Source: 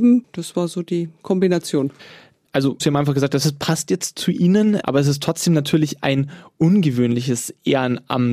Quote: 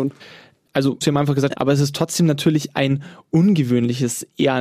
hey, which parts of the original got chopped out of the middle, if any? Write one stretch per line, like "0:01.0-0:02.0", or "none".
0:03.3-0:04.8